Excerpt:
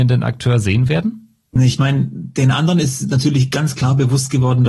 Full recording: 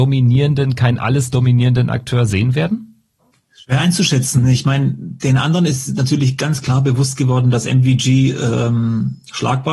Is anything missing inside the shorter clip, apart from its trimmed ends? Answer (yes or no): yes